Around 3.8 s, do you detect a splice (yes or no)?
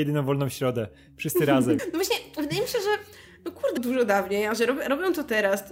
yes